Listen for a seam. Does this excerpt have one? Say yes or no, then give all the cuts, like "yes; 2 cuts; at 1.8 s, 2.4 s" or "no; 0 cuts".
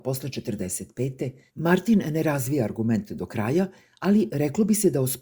yes; 1 cut; at 1.5 s